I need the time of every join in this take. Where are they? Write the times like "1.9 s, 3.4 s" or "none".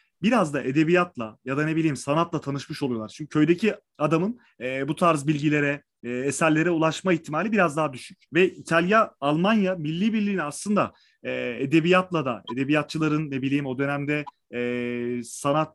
8.3 s